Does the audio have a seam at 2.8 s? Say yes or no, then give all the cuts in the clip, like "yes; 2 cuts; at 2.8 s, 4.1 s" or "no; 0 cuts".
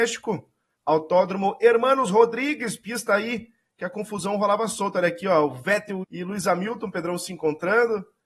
no; 1 cut; at 6.0 s